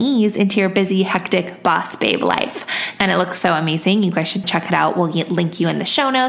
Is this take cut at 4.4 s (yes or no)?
yes